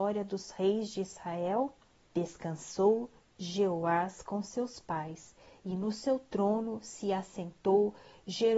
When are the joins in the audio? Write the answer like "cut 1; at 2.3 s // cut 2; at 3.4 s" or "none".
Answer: cut 1; at 2.0 s